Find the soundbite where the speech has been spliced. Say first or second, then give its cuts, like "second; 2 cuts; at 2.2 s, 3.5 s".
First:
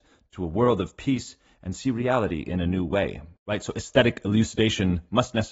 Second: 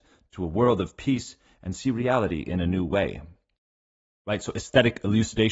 first; 1 cut; at 3.4 s